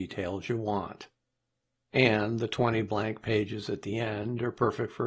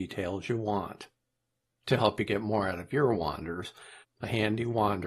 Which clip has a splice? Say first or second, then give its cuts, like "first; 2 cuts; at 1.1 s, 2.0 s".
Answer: second; 2 cuts; at 1.7 s, 4.0 s